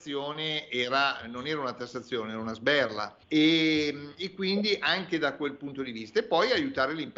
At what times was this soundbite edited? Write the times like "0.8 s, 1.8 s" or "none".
3.2 s